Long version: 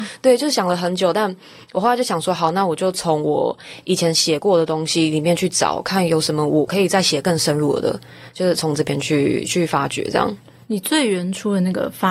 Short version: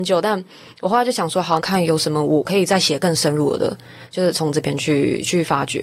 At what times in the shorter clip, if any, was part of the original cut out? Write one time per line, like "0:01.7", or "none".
0:01.6

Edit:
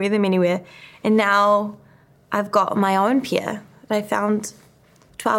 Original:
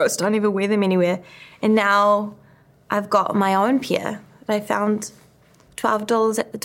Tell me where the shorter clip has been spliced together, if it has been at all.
none

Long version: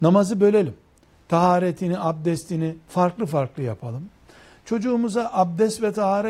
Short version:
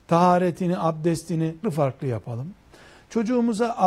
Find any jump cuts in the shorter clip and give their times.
0:01.6

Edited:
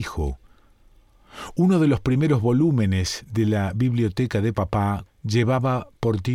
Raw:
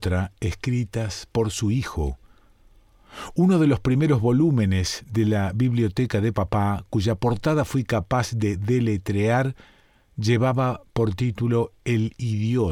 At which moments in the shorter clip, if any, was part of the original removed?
0:05.1

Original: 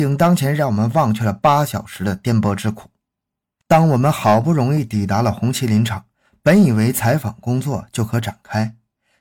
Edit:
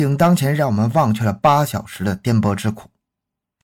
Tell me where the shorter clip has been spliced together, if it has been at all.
none

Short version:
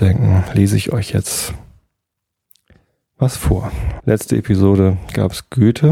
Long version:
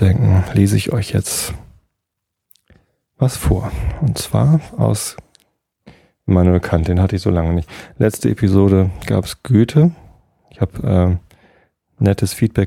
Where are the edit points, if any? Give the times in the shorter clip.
0:04.0

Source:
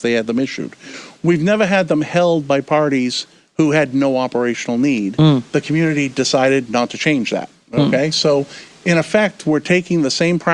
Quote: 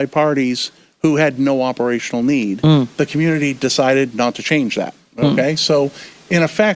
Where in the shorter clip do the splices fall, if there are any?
none

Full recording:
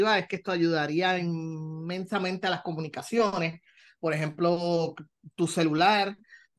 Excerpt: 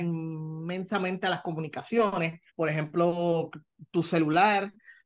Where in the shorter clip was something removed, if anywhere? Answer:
0:02.5

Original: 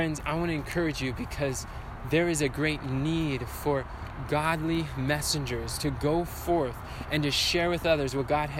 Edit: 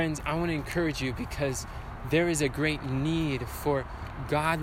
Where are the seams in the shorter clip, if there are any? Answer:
none

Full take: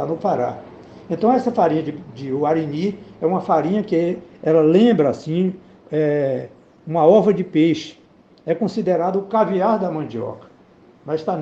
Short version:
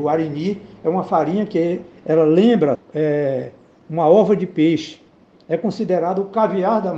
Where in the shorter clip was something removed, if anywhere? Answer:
0:02.7

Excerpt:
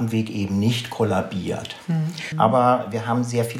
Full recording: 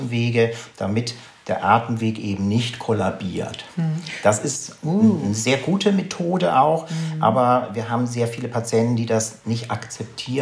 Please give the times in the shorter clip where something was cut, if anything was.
0:02.3

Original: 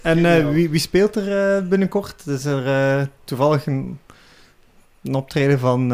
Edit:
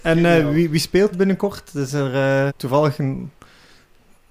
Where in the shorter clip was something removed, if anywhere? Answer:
0:01.1
0:02.5

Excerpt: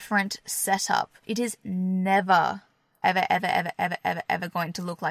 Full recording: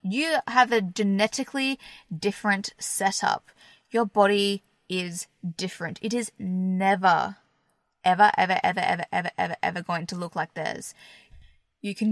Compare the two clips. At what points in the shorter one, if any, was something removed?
0:01.2
0:03.0

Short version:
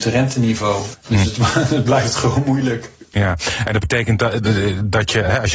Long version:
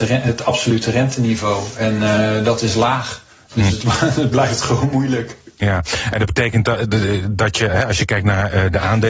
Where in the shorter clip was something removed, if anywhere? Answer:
0:00.9

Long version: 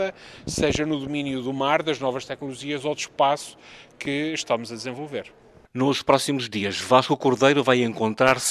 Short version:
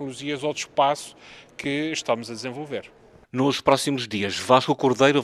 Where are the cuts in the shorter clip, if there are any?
none

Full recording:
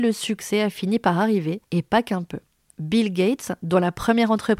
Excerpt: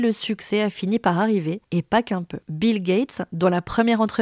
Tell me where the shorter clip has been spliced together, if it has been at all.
0:02.4

